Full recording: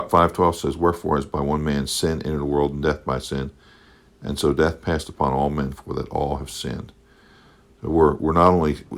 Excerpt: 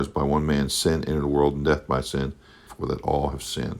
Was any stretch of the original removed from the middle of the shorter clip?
yes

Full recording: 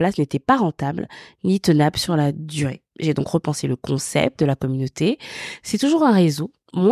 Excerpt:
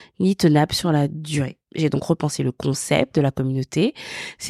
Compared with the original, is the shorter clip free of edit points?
yes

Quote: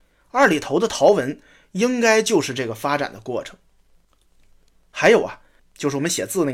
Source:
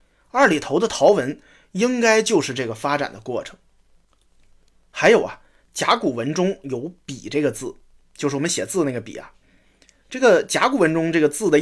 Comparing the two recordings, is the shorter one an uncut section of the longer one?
no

